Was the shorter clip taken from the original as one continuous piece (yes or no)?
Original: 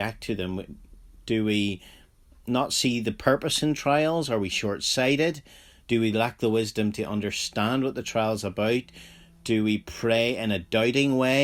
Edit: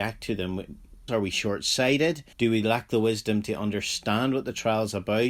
no